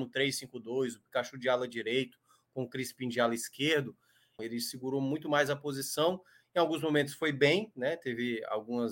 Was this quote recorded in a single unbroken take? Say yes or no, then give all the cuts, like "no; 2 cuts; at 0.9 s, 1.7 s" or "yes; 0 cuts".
no; 1 cut; at 4.4 s